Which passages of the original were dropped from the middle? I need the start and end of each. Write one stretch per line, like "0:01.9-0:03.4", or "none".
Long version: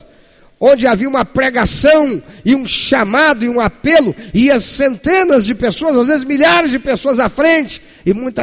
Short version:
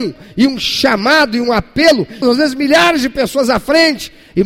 0:04.3-0:05.9